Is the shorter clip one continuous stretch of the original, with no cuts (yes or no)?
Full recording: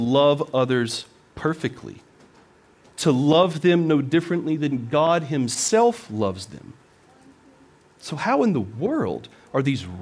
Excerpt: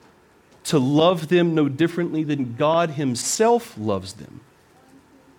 yes